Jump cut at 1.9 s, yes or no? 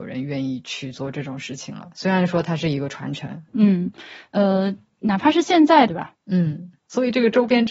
no